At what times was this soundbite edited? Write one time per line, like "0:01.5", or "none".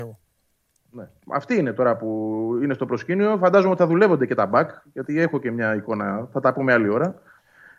none

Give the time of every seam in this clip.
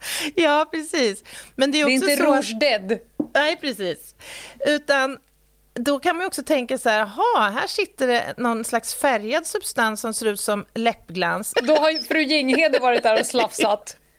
0:11.5

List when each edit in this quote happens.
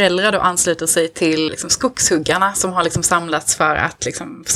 0:01.5

